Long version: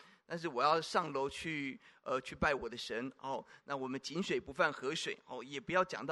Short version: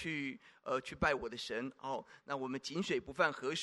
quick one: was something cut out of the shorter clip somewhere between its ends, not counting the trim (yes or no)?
no